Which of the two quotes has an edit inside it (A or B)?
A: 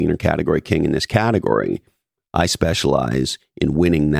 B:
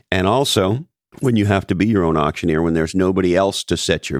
B